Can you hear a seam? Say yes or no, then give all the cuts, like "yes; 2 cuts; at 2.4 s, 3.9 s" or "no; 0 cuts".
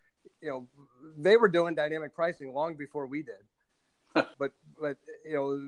yes; 1 cut; at 4.3 s